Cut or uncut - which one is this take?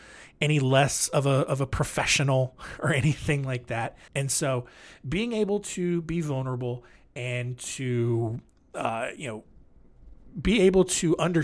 cut